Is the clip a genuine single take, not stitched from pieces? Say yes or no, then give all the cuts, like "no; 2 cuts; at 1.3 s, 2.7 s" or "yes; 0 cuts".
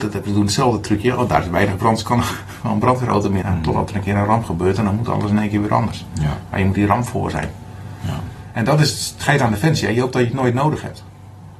no; 1 cut; at 3.4 s